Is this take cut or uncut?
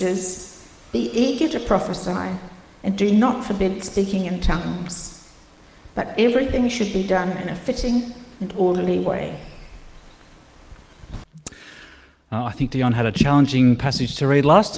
uncut